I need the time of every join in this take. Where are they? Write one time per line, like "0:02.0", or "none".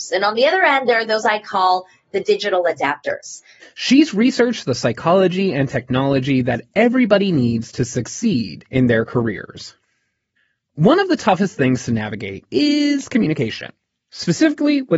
0:03.6
0:12.5

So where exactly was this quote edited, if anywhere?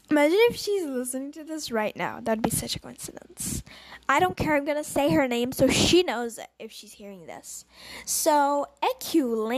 none

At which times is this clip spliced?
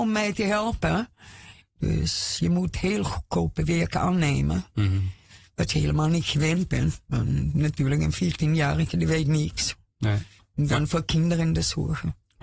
0:01.6
0:10.4

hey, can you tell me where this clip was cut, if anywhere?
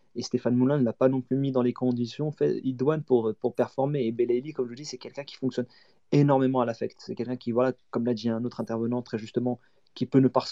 none

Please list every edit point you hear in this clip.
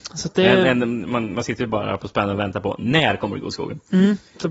none

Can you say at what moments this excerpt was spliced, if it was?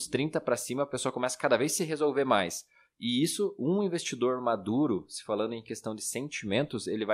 none

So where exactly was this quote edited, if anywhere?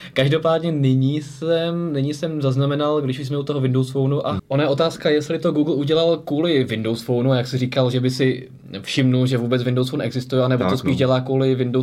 0:04.4

